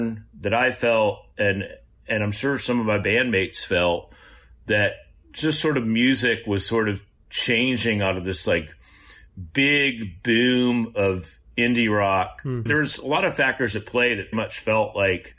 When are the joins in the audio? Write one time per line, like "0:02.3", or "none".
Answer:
0:12.7
0:14.3

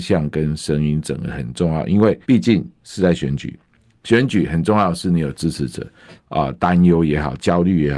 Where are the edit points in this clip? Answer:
0:02.2
0:06.2

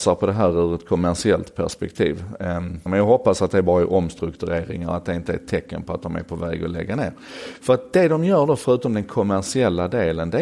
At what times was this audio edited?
0:02.9

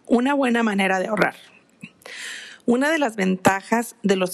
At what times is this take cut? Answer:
none

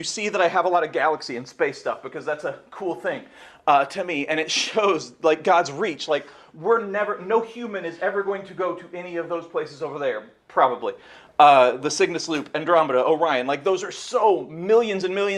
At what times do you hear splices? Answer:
none

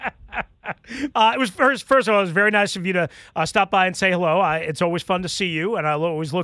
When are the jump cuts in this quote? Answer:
0:01.1

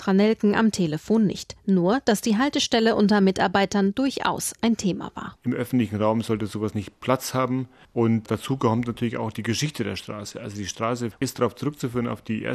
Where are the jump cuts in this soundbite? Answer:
0:05.4

